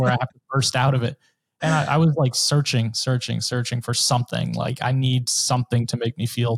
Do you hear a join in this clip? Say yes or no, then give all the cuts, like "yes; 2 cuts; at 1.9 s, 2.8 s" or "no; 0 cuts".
no; 0 cuts